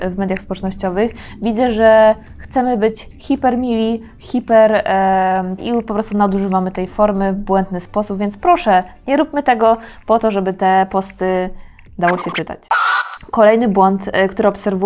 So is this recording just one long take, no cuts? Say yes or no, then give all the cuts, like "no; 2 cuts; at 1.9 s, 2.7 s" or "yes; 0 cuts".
no; 1 cut; at 5.6 s